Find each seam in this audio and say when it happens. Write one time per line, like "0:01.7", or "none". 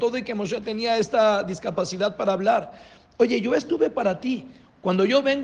none